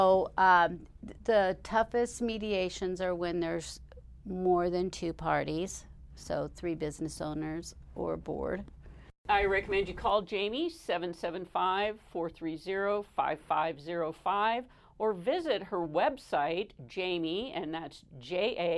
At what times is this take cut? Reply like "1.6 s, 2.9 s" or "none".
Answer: 1.2 s